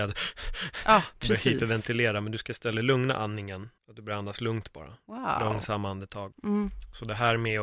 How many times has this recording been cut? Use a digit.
2